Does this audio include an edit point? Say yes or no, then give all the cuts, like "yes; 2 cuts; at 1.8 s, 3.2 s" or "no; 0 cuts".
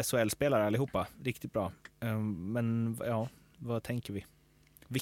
no; 0 cuts